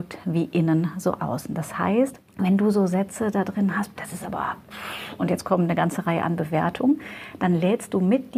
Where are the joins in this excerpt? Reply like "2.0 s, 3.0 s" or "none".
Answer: 2.3 s, 4.0 s